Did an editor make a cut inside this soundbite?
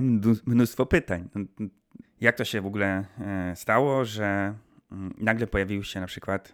yes; 1 cut; at 2.0 s

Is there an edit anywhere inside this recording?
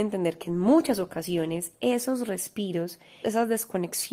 yes; 1 cut; at 3.2 s

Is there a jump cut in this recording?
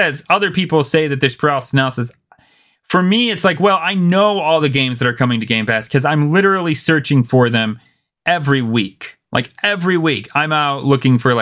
no; 0 cuts

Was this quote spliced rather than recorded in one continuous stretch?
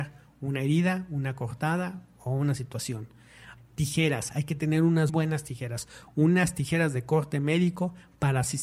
yes; 2 cuts; at 3.6 s, 5.1 s

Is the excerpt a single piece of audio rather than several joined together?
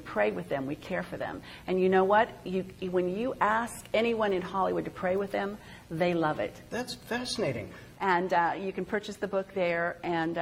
no; 2 cuts; at 6.7 s, 7.9 s

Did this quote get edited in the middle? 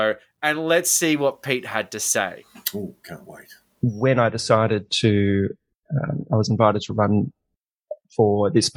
no; 0 cuts

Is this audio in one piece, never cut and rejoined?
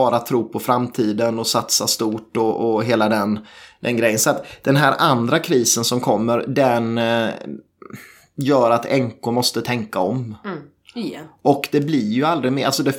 yes; 0 cuts

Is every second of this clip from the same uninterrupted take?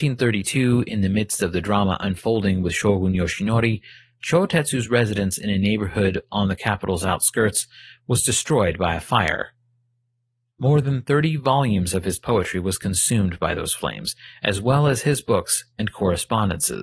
yes; 0 cuts

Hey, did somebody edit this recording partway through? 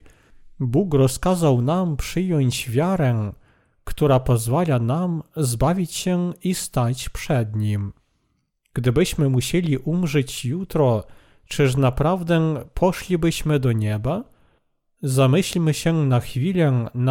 no; 0 cuts

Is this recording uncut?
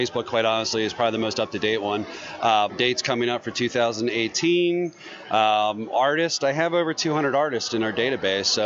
no; 1 cut; at 2.7 s

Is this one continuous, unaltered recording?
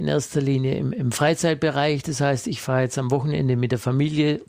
yes; 0 cuts

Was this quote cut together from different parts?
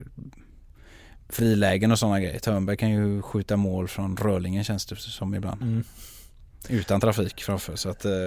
no; 0 cuts

